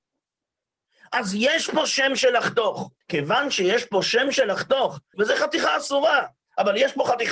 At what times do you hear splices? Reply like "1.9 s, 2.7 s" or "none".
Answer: 3.0 s, 5.1 s